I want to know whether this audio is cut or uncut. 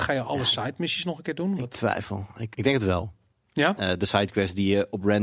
cut